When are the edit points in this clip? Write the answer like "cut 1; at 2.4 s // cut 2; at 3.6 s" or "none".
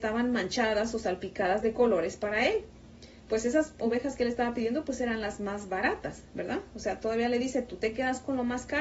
cut 1; at 3.2 s